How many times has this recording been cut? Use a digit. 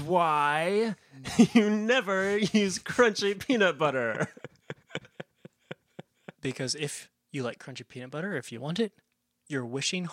1